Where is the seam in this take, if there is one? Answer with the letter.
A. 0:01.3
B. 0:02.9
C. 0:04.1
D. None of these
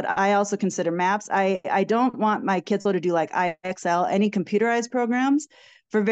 B